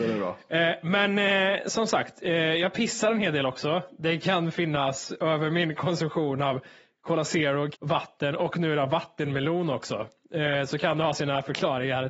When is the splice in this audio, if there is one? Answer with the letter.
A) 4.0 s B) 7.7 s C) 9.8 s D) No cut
B